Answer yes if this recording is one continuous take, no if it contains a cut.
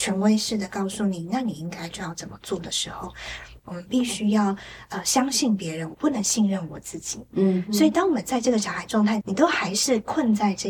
no